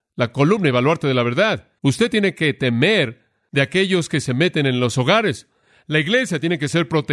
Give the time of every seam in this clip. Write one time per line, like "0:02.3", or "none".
0:01.8